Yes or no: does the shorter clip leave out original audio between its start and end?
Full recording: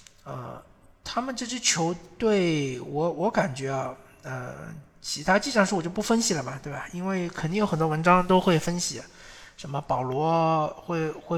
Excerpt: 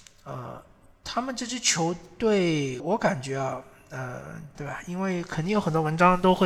yes